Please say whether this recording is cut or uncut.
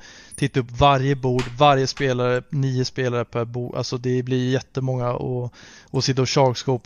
uncut